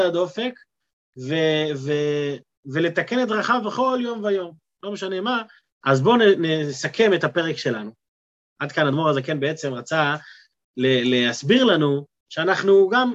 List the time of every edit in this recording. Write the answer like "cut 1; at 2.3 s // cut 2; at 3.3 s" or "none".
cut 1; at 5.7 s